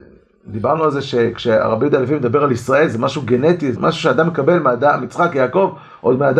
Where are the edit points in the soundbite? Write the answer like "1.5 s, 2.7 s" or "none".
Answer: 3.8 s, 5.0 s